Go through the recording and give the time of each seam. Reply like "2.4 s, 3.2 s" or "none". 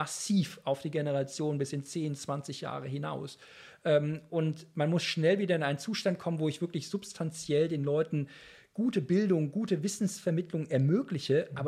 none